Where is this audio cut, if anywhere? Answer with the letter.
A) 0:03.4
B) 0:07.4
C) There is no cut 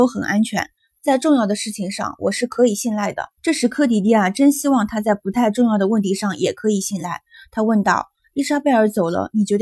A